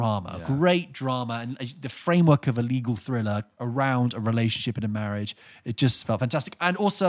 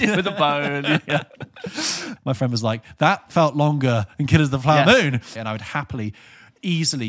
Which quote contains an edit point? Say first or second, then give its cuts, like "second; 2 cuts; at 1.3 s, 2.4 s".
second; 2 cuts; at 2.2 s, 5.4 s